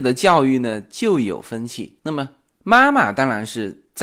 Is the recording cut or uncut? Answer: uncut